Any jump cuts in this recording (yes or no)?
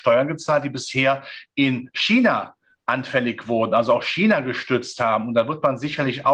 no